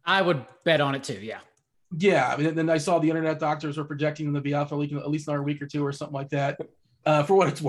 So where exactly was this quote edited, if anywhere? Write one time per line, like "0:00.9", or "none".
none

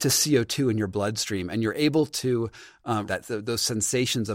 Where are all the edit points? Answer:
0:03.1

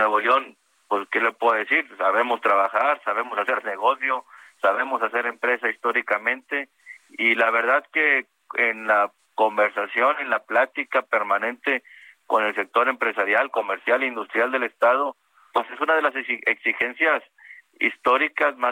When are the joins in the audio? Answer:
none

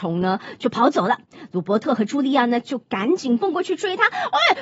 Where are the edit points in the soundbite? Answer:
none

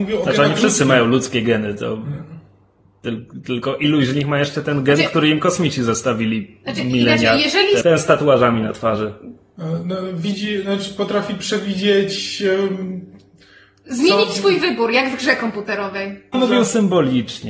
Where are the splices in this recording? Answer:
0:07.8
0:16.3

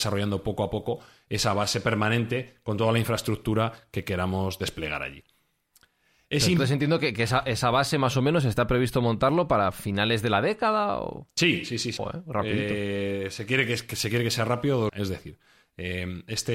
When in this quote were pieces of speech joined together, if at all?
0:12.0
0:14.9

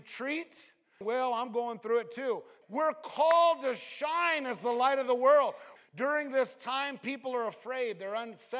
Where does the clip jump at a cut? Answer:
0:01.0
0:02.6
0:05.8

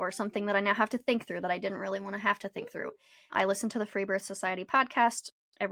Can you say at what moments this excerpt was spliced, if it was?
0:03.3

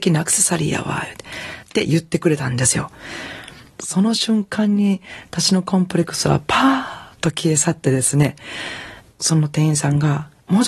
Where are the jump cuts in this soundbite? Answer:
0:01.6

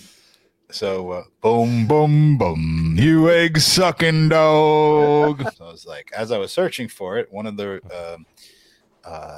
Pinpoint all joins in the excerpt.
0:01.9
0:05.5

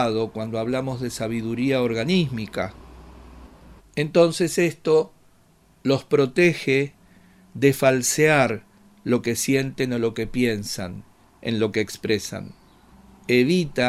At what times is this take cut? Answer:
0:03.8

